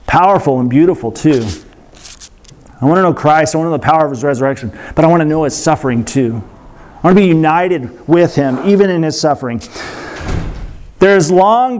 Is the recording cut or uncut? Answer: uncut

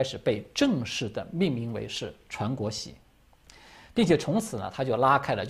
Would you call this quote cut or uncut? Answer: uncut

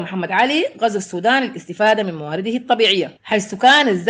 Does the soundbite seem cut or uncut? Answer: cut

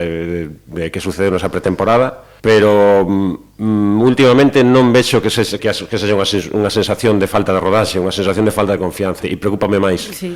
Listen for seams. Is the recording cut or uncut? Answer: cut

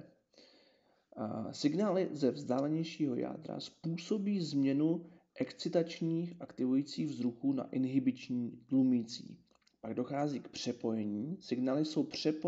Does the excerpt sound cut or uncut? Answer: uncut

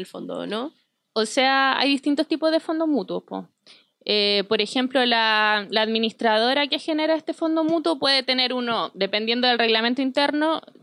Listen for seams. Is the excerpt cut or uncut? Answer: uncut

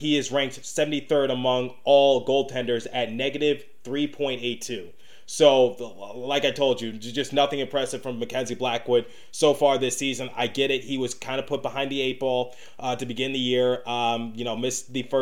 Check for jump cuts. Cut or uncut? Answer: uncut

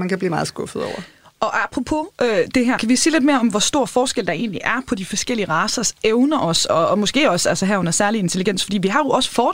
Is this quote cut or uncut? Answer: cut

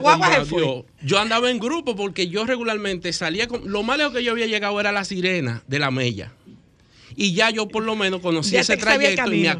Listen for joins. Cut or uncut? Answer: cut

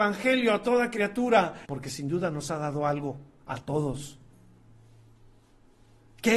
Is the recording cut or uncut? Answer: cut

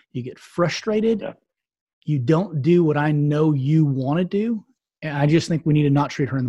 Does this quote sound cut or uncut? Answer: uncut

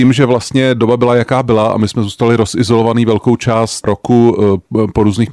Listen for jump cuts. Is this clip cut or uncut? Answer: cut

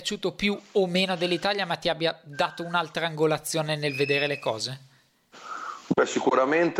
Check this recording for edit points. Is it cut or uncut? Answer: uncut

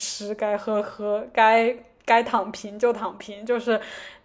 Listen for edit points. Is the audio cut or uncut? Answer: uncut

